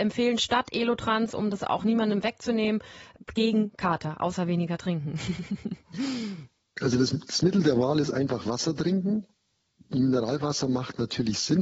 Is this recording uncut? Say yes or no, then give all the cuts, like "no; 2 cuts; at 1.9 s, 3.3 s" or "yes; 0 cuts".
yes; 0 cuts